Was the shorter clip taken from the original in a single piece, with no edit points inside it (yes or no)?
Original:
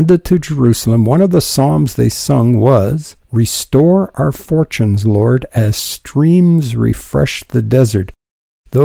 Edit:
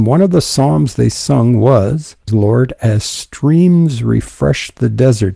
no